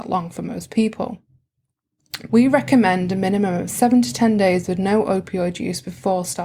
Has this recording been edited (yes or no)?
yes